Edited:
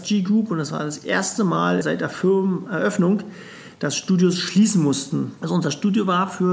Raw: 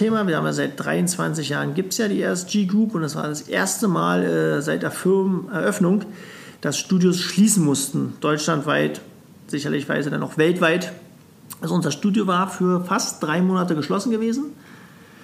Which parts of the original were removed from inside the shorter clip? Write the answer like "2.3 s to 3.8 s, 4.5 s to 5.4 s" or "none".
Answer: 4.2 s to 4.6 s, 8.2 s to 11.6 s